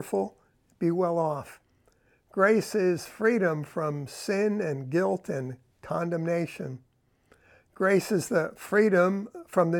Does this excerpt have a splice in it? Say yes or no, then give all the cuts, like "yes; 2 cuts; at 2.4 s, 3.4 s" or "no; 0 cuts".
yes; 1 cut; at 2.1 s